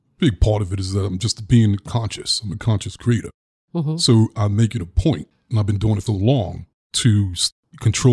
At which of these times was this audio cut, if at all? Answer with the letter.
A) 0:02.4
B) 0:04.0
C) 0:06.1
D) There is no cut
C